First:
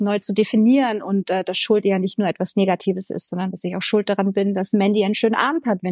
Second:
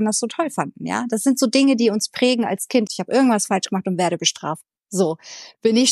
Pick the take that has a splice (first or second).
second